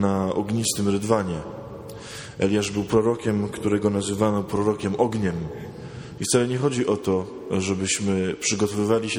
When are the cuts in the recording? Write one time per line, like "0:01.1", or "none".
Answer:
0:06.2